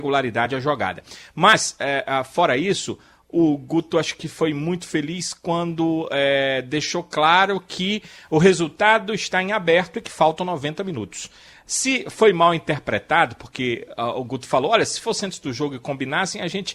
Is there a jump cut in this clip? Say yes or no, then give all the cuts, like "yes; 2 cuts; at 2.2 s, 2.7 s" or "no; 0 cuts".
no; 0 cuts